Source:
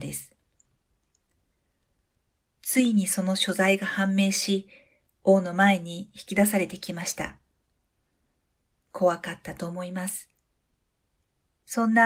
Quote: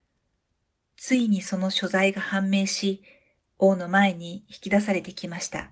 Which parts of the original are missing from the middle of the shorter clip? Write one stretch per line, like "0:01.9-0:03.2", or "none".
none